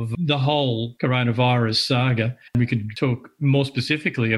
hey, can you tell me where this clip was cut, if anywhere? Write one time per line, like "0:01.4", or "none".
0:02.5